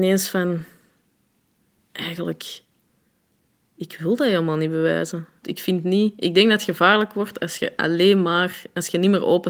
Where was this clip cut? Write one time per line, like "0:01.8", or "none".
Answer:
0:05.4